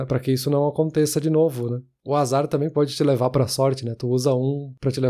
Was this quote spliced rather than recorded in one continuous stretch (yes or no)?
no